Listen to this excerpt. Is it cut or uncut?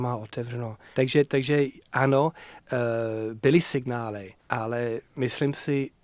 cut